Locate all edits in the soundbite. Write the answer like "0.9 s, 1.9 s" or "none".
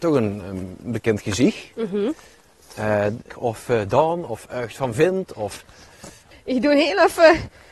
3.3 s, 6.3 s